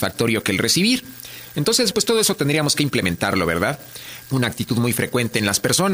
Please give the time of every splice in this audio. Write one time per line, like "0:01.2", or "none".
0:01.9
0:04.2